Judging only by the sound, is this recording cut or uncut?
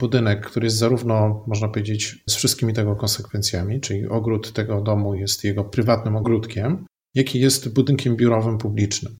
cut